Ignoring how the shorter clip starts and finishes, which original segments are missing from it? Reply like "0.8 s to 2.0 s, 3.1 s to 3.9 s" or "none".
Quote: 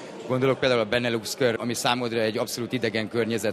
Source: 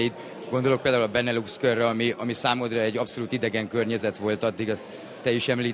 1.8 s to 2.2 s